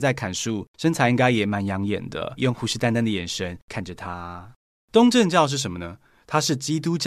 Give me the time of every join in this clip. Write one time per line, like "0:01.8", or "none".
0:02.4
0:04.8